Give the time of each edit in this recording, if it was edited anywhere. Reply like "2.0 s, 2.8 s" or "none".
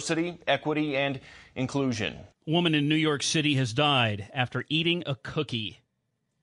2.3 s

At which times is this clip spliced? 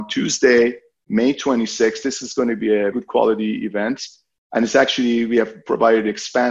2.9 s

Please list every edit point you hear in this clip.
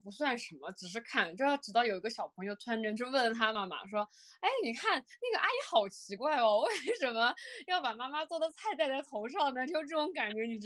3.6 s

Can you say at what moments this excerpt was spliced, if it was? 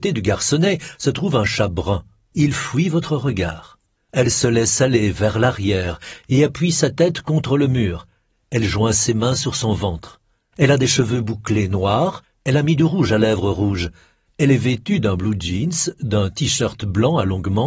4.0 s

